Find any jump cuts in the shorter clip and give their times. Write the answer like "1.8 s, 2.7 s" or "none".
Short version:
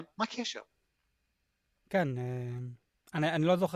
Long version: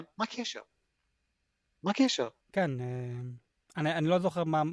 1.8 s